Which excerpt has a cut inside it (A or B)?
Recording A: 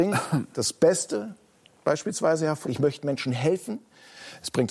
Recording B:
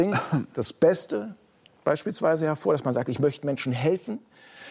A